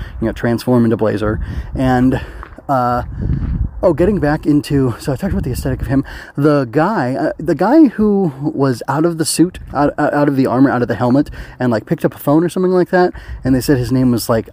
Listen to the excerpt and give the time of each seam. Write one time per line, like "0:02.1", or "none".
none

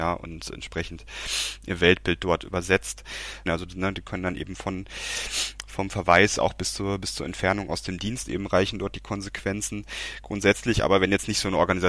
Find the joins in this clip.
0:03.5

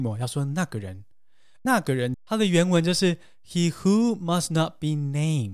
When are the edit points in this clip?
none

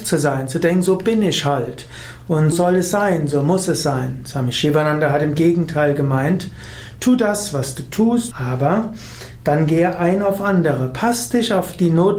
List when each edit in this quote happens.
0:02.5
0:08.3

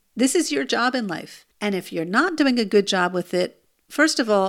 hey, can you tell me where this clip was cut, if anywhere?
0:01.5

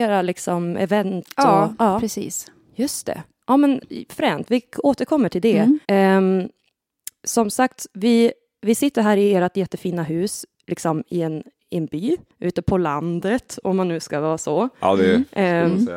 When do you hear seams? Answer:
0:05.8

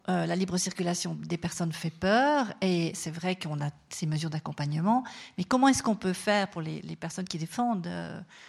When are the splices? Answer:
0:06.8

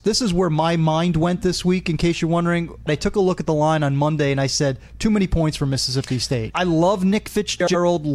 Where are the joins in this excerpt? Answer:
0:02.9
0:06.5

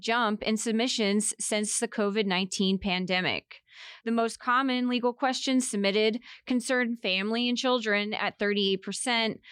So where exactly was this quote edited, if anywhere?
none

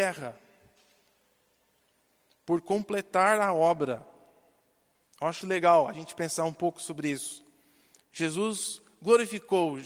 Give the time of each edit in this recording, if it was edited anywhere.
0:05.4

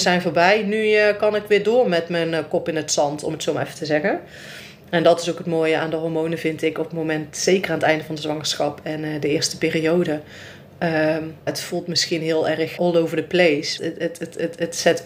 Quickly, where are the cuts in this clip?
0:11.5
0:12.8
0:13.8

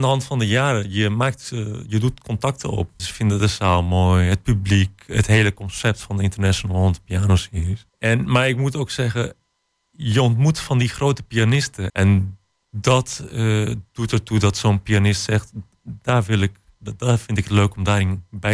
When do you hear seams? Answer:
0:03.0
0:07.9
0:11.9

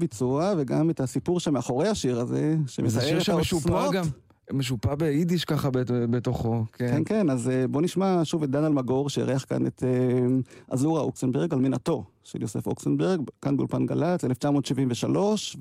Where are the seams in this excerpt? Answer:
none

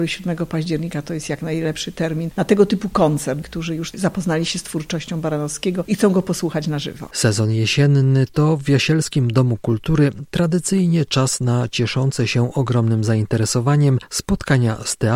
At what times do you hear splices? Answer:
0:03.4

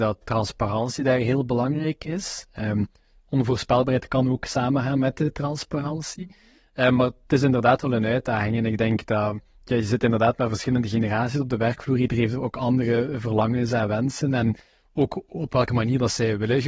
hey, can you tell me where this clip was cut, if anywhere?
none

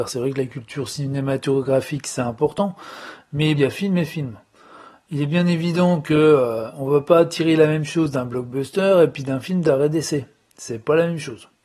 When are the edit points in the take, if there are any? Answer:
0:03.6

